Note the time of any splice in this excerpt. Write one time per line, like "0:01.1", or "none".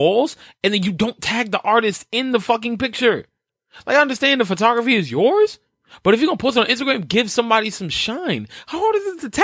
none